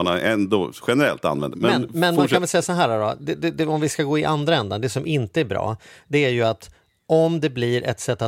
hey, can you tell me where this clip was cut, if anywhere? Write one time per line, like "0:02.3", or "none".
0:01.5